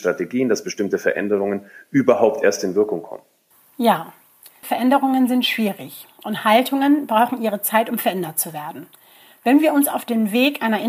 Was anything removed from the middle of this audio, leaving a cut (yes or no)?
yes